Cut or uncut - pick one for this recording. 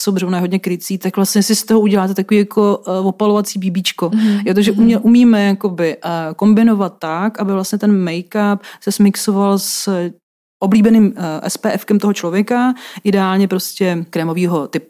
uncut